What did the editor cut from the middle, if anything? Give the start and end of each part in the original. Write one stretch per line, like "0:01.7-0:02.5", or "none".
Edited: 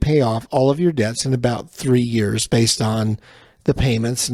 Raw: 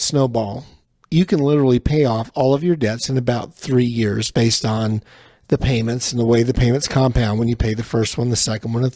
none